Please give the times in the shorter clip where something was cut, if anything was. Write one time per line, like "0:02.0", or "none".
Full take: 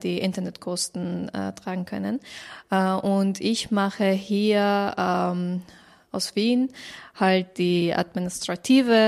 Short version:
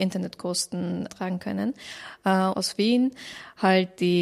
0:01.1
0:02.5